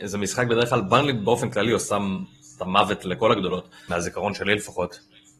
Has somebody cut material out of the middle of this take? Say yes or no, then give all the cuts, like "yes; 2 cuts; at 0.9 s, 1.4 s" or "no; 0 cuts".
yes; 1 cut; at 3.9 s